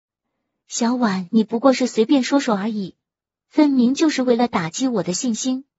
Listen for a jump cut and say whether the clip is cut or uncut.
uncut